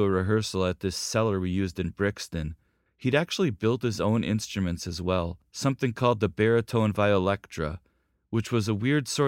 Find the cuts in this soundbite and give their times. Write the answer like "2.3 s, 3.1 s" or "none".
2.9 s